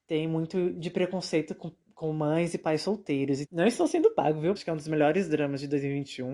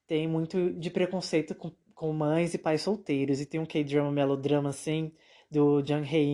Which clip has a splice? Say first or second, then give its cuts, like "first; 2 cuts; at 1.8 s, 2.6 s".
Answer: first; 2 cuts; at 3.4 s, 4.6 s